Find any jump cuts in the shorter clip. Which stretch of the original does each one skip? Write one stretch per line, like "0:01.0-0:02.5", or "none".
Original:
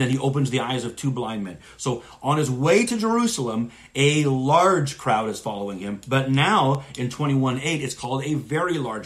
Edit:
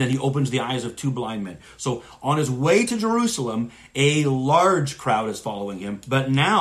none